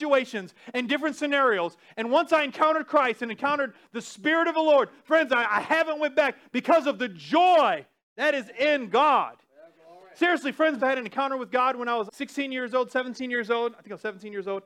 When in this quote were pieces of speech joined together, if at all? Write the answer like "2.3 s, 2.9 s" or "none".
10.8 s, 12.1 s